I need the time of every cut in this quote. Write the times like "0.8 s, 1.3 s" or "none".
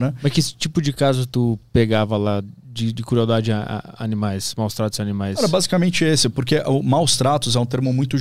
none

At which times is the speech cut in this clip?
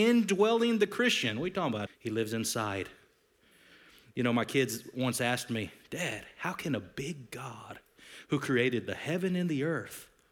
1.9 s

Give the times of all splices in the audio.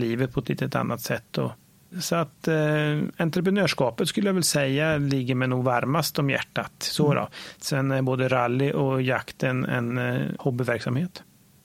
10.4 s

